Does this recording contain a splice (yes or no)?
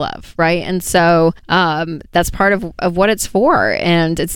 yes